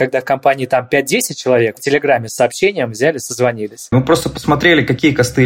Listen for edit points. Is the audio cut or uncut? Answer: cut